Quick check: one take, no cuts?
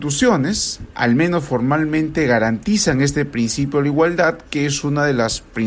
yes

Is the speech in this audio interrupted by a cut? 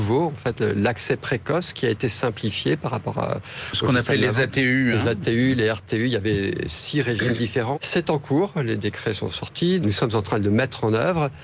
yes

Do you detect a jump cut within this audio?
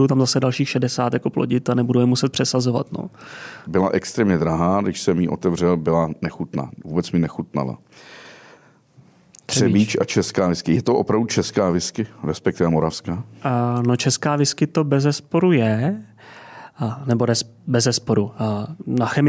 yes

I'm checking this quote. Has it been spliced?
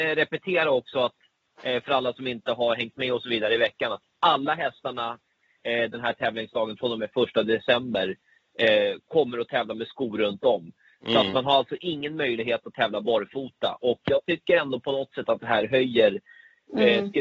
no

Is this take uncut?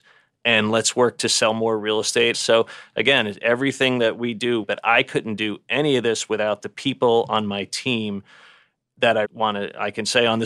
no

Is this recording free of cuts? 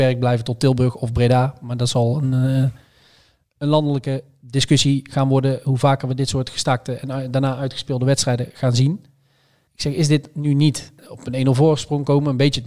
no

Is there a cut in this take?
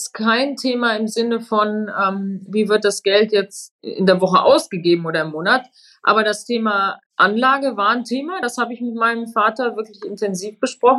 no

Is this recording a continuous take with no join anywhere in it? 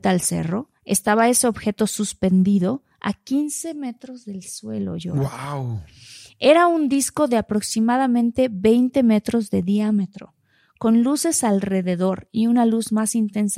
yes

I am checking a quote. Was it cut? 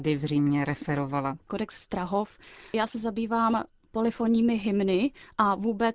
yes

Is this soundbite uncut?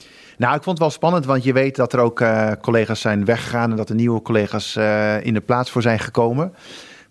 yes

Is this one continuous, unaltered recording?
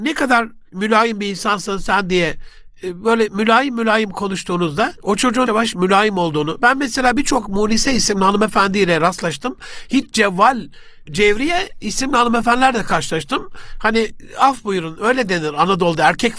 no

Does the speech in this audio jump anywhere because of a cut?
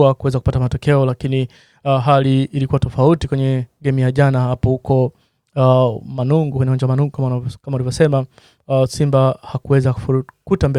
no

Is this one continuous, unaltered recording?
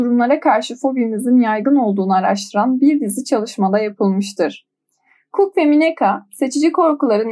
yes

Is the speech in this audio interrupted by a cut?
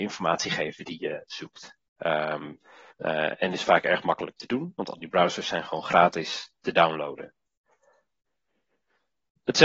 yes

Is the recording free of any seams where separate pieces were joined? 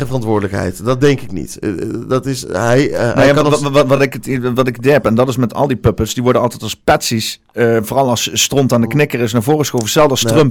yes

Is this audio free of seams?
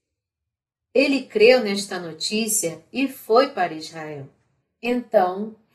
no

